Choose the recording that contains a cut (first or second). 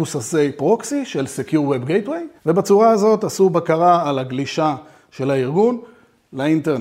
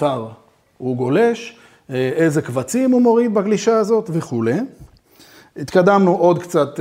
first